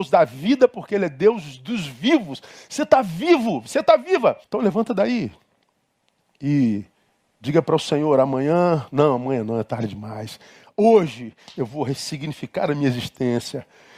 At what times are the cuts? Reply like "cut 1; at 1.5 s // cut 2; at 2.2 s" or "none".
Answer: cut 1; at 4.4 s